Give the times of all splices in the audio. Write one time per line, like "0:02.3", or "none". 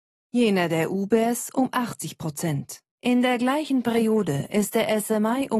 0:03.0